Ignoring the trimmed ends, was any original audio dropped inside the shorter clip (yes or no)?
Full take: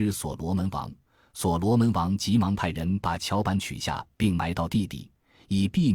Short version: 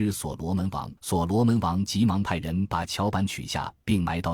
yes